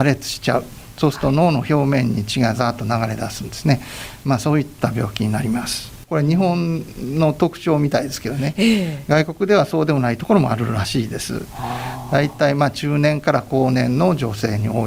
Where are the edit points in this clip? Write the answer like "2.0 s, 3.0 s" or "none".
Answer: 6.0 s